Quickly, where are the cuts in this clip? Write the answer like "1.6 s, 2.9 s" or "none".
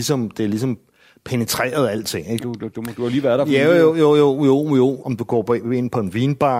2.4 s, 5.0 s